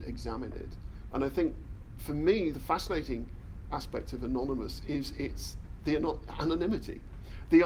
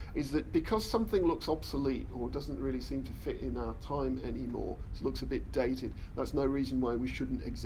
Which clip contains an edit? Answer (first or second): first